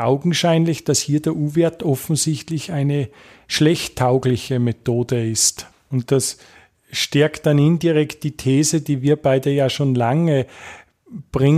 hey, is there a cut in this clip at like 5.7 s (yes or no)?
yes